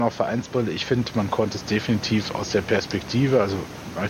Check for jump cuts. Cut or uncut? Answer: uncut